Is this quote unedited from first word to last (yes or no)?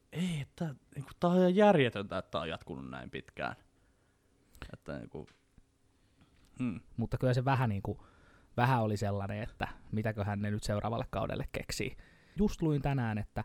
no